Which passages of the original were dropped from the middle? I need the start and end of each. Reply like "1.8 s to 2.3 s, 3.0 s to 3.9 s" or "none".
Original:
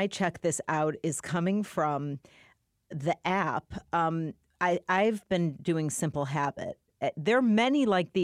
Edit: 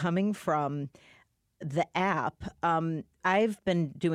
4.5 s to 4.8 s